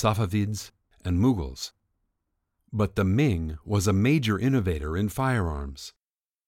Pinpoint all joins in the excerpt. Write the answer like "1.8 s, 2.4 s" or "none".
0.9 s